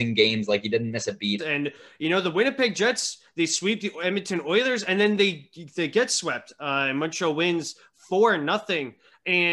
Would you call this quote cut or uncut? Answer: cut